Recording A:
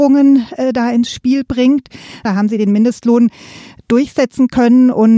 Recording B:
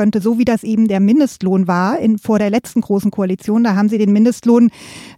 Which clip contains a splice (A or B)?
A